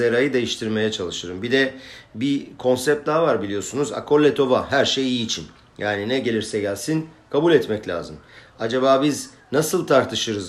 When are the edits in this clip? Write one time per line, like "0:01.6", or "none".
none